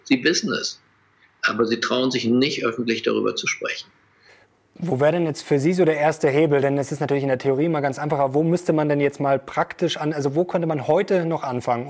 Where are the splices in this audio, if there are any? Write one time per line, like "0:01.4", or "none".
none